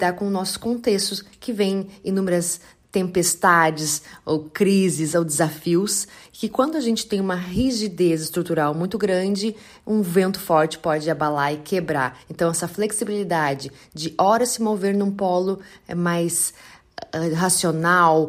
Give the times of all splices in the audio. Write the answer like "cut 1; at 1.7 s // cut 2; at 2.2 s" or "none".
none